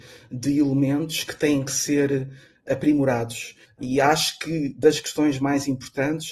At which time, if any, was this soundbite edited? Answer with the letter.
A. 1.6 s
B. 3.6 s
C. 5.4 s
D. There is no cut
B